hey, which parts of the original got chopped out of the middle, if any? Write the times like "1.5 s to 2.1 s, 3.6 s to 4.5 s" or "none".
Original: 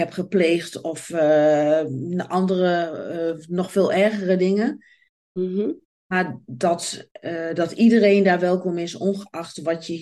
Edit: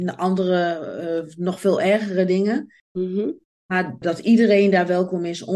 4.9 s to 5.2 s, 6.4 s to 7.5 s